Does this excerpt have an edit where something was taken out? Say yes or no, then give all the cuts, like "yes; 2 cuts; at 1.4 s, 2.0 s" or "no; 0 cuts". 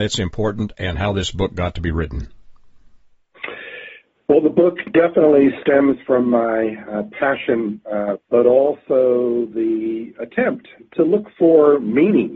yes; 1 cut; at 8.2 s